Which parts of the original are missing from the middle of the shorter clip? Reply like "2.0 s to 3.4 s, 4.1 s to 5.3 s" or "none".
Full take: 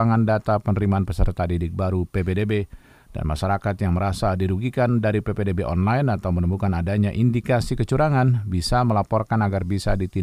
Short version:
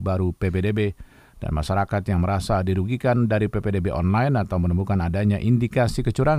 none